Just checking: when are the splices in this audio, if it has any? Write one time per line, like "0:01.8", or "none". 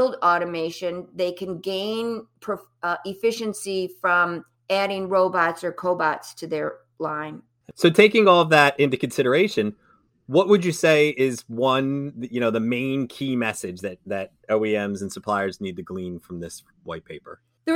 none